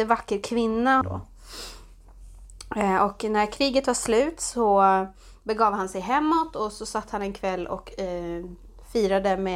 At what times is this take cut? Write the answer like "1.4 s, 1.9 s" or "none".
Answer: 1.0 s